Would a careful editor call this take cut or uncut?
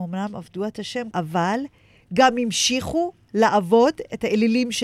cut